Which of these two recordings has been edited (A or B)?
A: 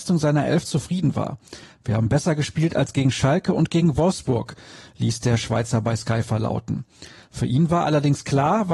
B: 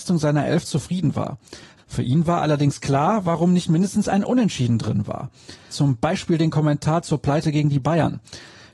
B